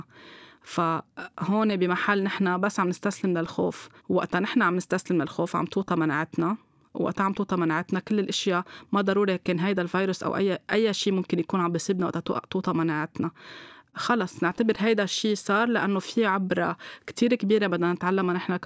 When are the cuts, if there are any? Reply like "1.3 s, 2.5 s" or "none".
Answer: 4.0 s